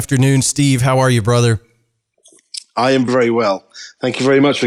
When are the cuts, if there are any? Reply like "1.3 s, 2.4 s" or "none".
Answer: 3.1 s